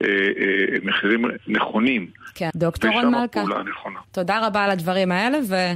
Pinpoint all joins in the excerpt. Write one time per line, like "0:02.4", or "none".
0:02.5
0:04.0